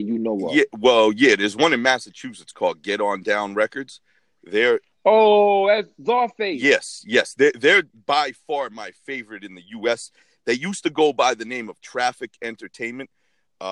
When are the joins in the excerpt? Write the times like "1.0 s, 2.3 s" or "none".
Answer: none